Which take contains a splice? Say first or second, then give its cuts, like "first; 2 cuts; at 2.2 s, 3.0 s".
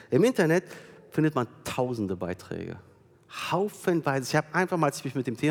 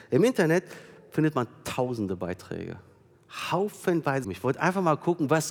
second; 1 cut; at 4.2 s